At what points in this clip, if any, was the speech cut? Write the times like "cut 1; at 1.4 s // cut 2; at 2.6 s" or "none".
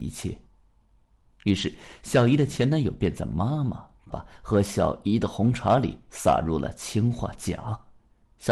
cut 1; at 1.3 s // cut 2; at 4.1 s

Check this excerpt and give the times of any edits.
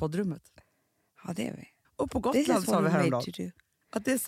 cut 1; at 1.8 s

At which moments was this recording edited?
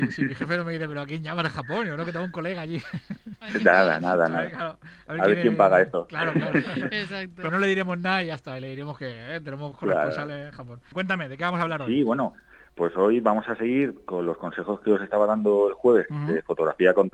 cut 1; at 7.5 s // cut 2; at 10.9 s // cut 3; at 16.1 s

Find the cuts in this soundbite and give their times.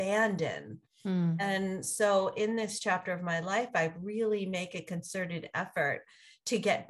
none

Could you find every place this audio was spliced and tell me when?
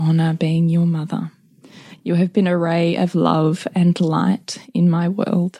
none

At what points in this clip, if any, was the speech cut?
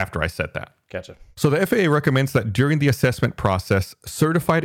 none

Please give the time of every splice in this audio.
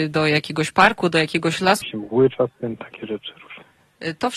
cut 1; at 1.8 s

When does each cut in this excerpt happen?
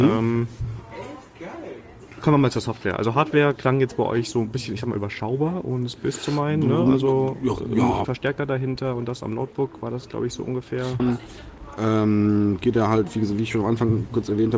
cut 1; at 8.0 s // cut 2; at 11.0 s

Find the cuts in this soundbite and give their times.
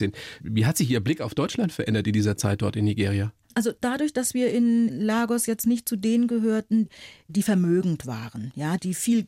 cut 1; at 3.4 s

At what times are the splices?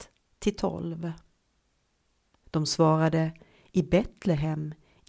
cut 1; at 2.4 s

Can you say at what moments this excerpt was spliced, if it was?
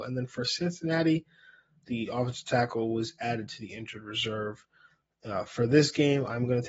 cut 1; at 1.8 s

